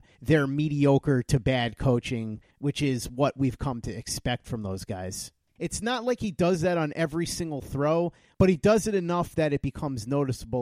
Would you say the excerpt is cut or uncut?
cut